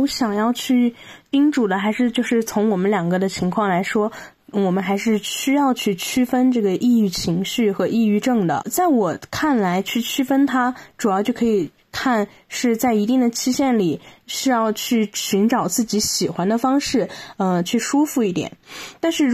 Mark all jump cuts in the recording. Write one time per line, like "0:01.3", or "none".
0:14.2
0:17.6